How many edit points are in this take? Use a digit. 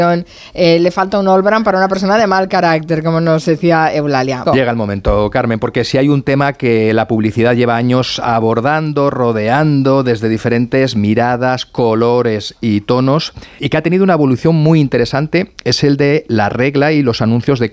2